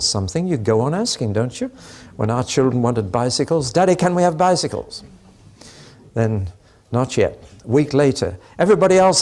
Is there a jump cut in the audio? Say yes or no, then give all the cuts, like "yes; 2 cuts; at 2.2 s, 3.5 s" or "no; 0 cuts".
no; 0 cuts